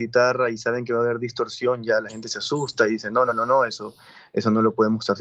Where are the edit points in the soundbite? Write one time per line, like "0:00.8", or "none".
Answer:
none